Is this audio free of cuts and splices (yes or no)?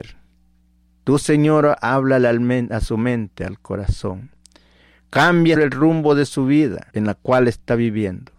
no